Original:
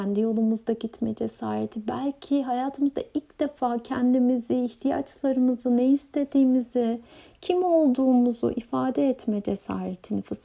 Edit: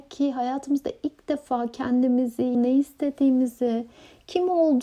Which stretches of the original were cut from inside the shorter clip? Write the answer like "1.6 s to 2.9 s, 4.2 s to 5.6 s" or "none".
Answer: 4.7 s to 5.7 s